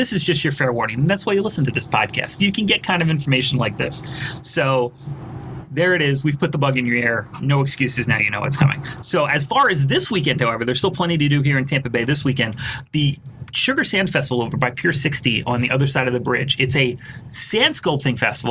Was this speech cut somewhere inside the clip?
no; 0 cuts

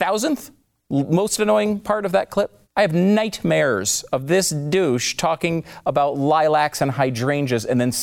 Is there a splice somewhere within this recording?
yes; 1 cut; at 2.6 s

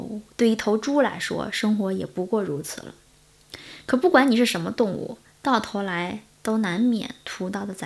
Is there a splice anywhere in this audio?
no; 0 cuts

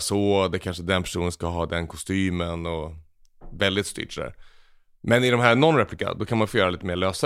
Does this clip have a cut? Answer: no; 0 cuts

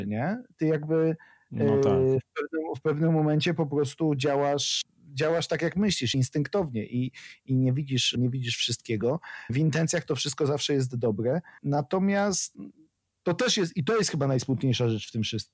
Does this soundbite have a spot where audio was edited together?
no; 0 cuts

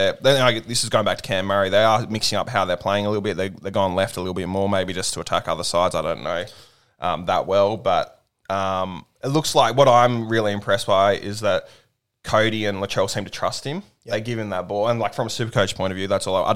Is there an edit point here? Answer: no; 0 cuts

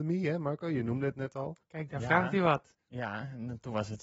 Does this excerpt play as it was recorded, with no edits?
no; 1 cut; at 1.6 s

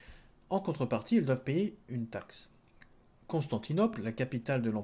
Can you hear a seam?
no; 0 cuts

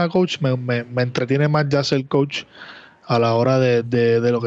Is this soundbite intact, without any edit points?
yes; 0 cuts

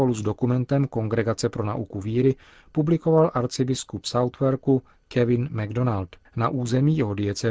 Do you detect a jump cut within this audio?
yes; 1 cut; at 6.3 s

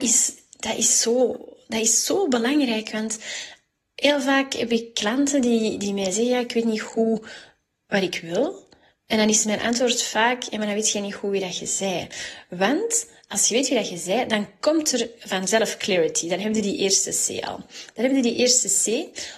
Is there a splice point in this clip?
no; 0 cuts

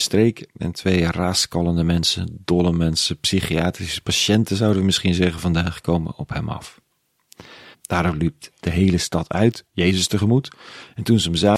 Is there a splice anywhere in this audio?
yes; 1 cut; at 7.7 s

